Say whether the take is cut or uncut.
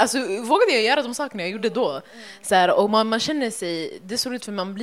uncut